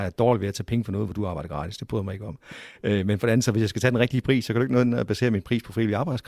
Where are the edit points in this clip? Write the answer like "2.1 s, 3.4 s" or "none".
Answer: none